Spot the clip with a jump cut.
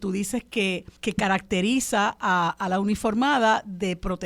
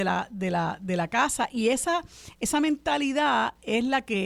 first; 1 cut; at 1.0 s

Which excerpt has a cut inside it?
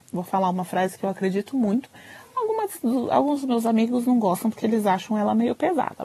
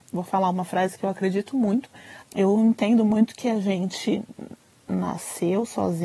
second; 1 cut; at 2.2 s

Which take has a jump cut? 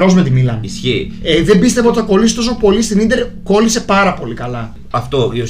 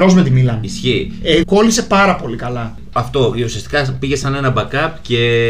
second; 1 cut; at 1.4 s

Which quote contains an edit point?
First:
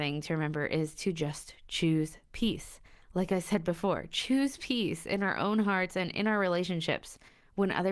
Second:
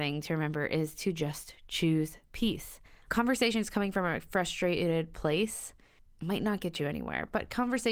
second; 1 cut; at 3.1 s

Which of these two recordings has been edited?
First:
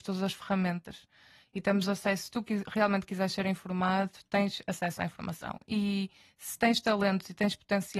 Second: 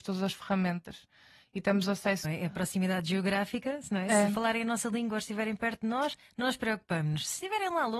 second; 1 cut; at 2.2 s

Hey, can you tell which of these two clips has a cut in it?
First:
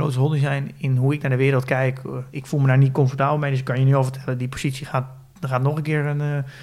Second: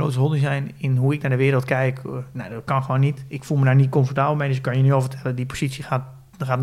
first; 1 cut; at 2.3 s

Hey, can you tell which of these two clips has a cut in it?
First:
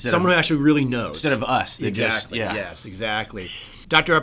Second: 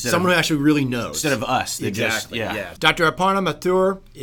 second; 1 cut; at 2.8 s

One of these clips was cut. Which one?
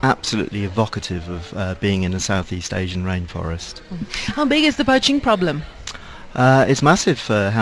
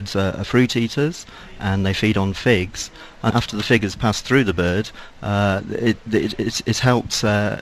second; 1 cut; at 3.3 s

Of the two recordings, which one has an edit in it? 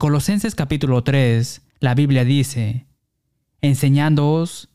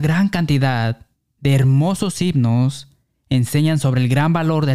first; 1 cut; at 1.7 s

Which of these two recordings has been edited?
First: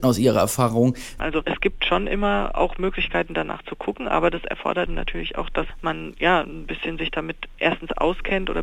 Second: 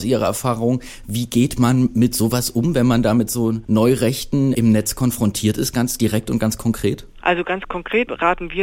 first; 2 cuts; at 1.2 s, 4.9 s

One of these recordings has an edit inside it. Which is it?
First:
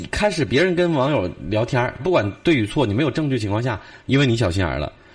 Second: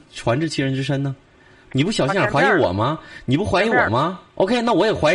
first; 2 cuts; at 2.0 s, 4.0 s

